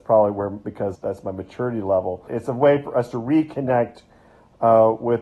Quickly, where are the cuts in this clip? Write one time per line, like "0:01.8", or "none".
0:00.9
0:02.3